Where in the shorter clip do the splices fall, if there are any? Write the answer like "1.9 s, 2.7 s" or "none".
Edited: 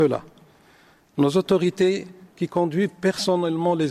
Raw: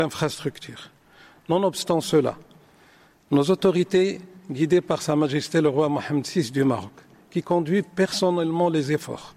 2.3 s